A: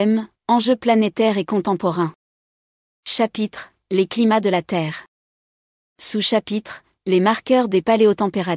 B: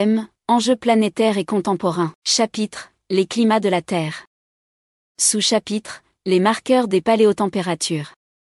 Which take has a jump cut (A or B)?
B